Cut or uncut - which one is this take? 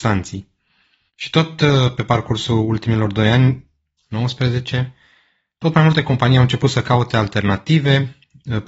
cut